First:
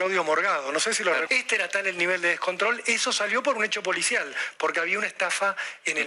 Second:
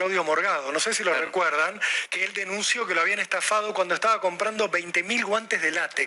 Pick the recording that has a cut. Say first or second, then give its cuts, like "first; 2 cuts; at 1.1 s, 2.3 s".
first; 1 cut; at 1.3 s